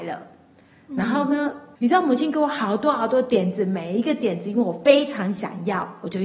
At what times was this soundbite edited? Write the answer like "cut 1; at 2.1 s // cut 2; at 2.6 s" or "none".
cut 1; at 1.8 s